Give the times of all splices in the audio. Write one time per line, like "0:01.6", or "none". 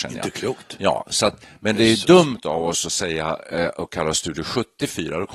none